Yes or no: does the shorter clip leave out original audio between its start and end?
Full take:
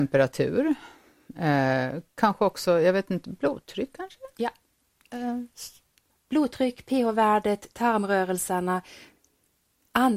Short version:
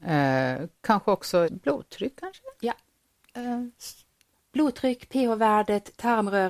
yes